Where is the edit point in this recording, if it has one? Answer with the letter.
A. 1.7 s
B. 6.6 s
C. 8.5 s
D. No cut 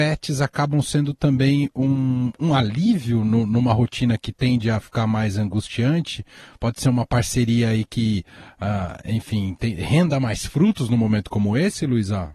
D